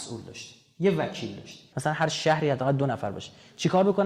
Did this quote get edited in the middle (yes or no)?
yes